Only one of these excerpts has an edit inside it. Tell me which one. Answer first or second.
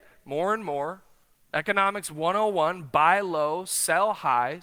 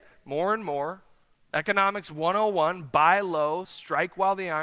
second